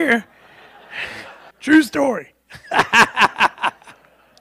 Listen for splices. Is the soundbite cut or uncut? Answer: cut